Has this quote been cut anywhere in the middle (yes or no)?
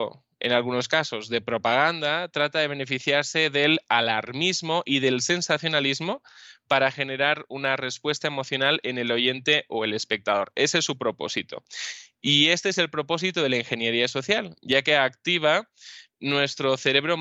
no